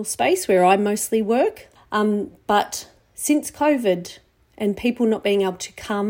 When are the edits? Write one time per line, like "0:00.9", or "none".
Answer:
0:01.8